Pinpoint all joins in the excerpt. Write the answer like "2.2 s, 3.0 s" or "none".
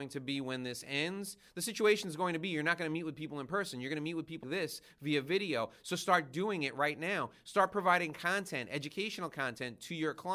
4.4 s